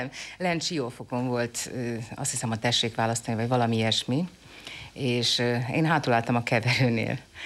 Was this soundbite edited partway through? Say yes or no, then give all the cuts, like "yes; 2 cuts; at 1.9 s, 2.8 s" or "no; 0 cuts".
no; 0 cuts